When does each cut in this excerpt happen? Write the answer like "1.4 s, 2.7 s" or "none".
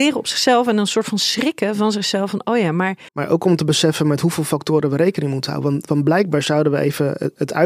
3.1 s